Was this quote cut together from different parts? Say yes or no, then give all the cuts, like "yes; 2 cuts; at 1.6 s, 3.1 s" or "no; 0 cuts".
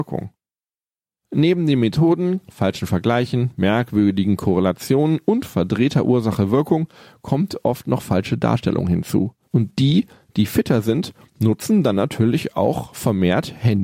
yes; 1 cut; at 9.5 s